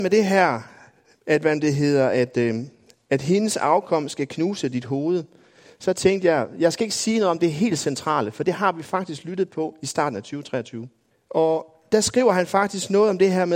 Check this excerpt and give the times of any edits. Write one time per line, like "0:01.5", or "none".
0:11.1